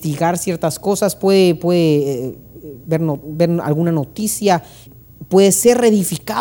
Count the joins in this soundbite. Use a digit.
1